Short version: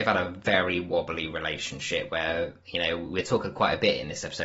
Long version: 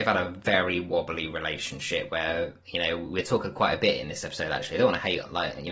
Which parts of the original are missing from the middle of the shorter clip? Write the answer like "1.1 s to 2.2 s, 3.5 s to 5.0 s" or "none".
none